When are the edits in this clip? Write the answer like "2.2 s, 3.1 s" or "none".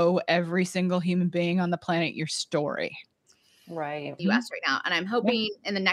4.2 s

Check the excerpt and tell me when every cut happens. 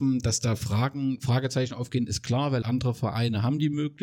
2.6 s

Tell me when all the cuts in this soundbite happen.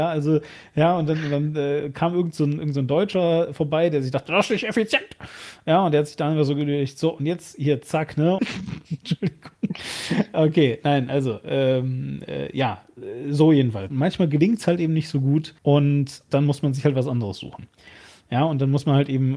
8.4 s, 13.9 s, 15.6 s

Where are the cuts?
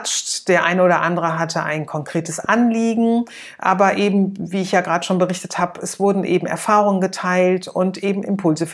none

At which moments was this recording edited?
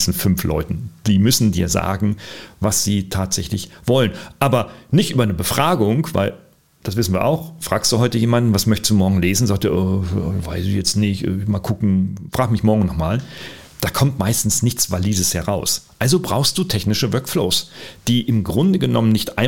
none

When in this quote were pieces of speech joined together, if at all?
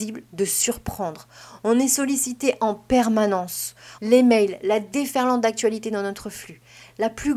4.0 s

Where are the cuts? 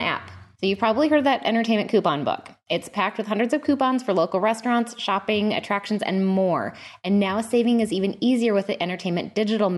none

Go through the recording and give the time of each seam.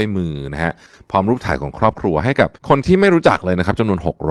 2.6 s

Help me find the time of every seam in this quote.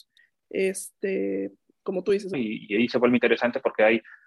2.3 s

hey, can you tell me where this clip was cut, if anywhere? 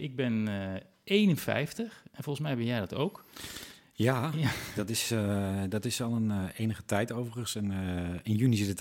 none

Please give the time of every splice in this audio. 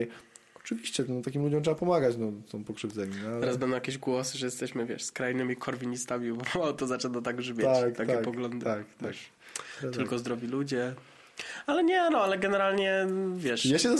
none

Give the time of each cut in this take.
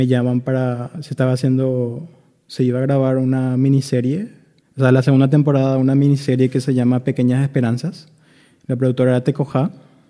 none

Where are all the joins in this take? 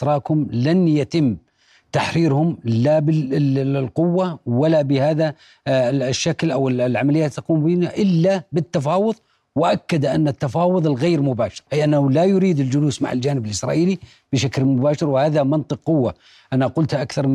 11.7 s

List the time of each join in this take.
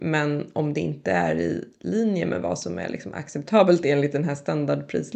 none

